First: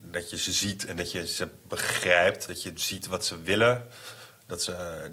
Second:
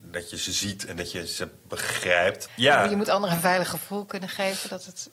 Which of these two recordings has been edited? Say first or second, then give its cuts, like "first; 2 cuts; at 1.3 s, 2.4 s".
second; 1 cut; at 2.5 s